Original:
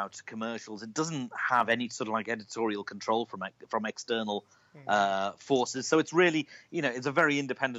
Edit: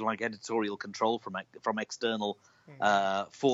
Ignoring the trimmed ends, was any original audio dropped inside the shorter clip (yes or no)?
no